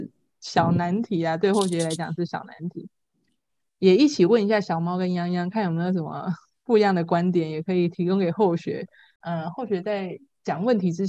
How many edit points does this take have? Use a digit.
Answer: 0